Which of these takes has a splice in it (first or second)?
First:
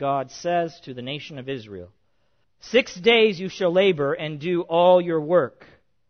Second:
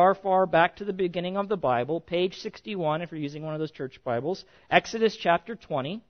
first